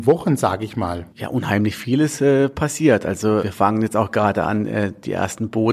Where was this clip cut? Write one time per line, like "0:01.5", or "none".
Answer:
0:03.4